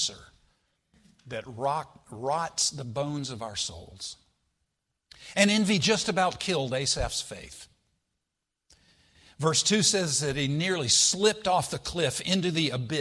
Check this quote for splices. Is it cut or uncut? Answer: uncut